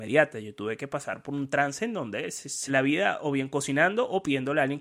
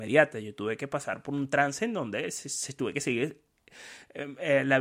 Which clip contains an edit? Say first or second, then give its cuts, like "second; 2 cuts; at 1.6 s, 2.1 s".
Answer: first; 1 cut; at 2.7 s